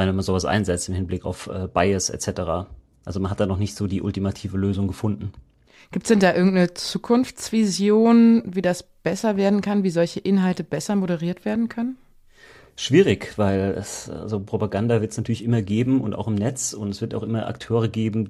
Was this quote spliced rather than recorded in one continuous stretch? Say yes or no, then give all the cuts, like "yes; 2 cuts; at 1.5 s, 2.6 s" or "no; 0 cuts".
no; 0 cuts